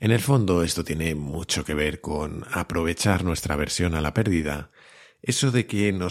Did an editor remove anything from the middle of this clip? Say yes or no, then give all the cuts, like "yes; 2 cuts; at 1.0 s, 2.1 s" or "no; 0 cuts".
no; 0 cuts